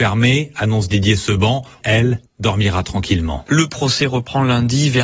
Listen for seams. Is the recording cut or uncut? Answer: cut